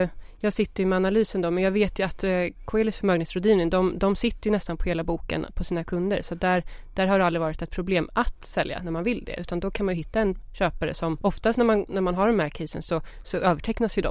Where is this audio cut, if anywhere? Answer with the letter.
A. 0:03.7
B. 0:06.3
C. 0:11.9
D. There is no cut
D